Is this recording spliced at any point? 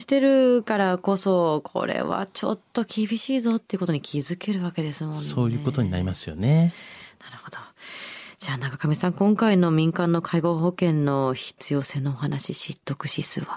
no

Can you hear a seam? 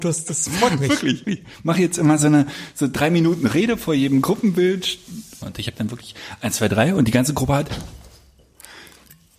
yes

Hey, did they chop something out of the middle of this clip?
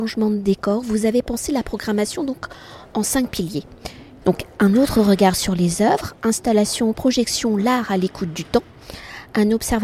yes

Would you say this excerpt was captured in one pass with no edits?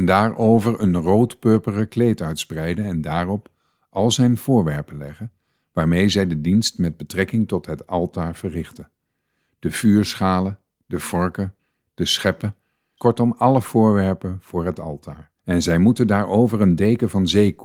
no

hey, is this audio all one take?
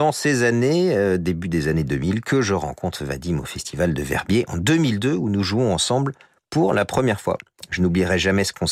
yes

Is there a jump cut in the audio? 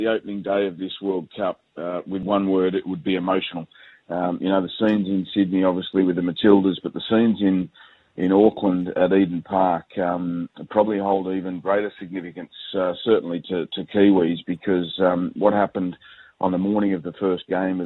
no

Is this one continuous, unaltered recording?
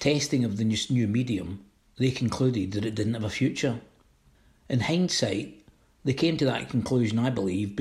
yes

